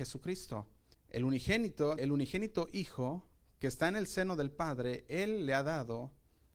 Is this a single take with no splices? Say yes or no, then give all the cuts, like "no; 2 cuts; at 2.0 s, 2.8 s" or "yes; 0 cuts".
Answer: no; 2 cuts; at 0.9 s, 2.0 s